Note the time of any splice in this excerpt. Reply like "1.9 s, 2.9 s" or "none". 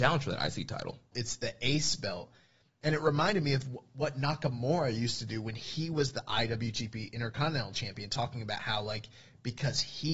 1.1 s